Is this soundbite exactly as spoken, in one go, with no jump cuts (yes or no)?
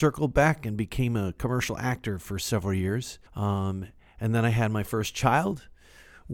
no